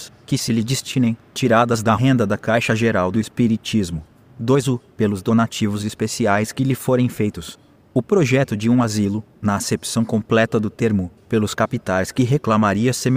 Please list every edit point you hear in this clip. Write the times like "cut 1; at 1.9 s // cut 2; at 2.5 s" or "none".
cut 1; at 7.8 s // cut 2; at 11.2 s